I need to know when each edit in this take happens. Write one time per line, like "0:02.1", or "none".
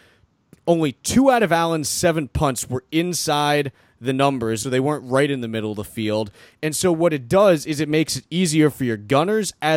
0:04.6
0:06.6